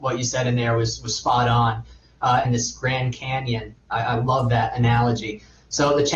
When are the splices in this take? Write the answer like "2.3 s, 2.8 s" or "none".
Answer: 2.4 s